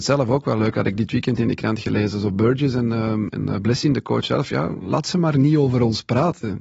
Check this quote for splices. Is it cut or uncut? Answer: cut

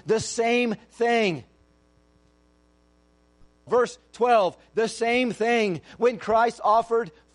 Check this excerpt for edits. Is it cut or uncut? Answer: cut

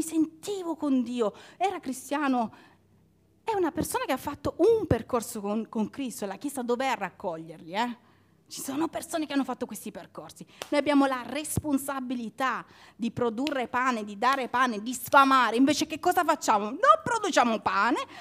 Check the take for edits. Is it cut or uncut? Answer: uncut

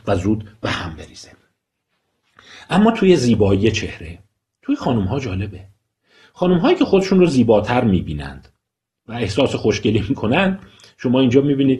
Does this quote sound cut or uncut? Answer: uncut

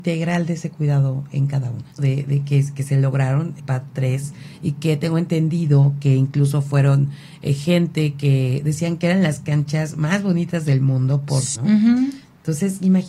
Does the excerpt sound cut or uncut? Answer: cut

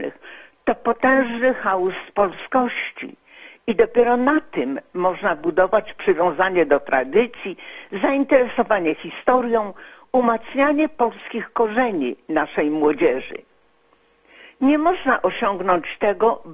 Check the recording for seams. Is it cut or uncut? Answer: uncut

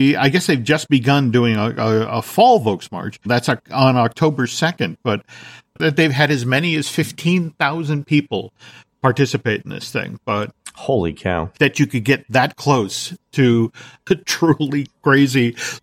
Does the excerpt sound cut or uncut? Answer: cut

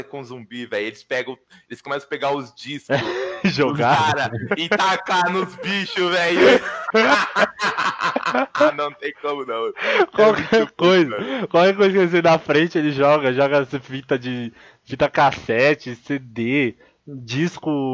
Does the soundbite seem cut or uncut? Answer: uncut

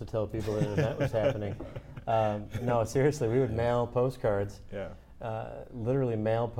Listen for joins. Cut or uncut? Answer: uncut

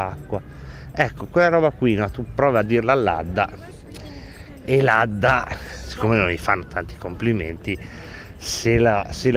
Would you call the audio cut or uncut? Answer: uncut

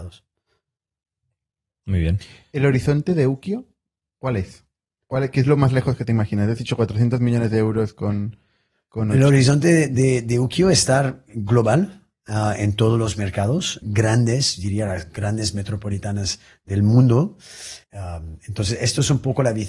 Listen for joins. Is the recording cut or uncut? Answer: cut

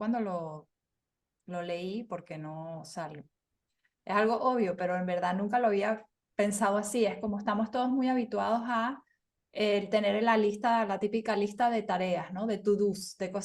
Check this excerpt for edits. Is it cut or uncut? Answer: uncut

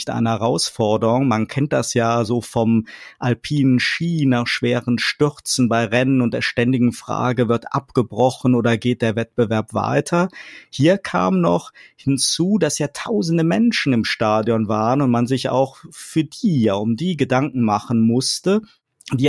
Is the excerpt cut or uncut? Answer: uncut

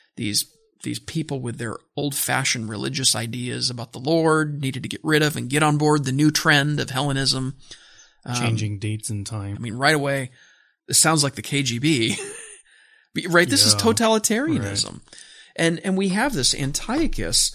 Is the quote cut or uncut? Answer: cut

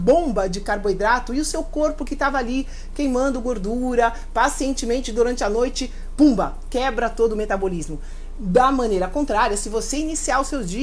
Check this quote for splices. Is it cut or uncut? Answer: cut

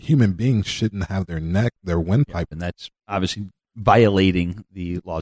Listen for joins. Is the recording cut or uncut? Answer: cut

